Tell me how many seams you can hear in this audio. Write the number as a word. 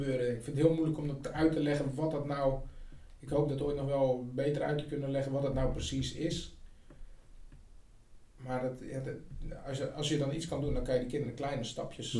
zero